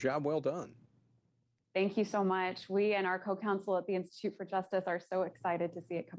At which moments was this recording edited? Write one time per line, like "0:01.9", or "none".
none